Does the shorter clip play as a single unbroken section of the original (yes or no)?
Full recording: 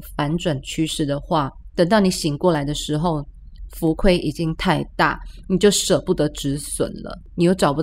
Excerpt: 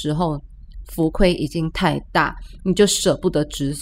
yes